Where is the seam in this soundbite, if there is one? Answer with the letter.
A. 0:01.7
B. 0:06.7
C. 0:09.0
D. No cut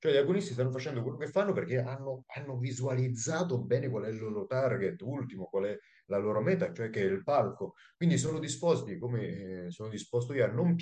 D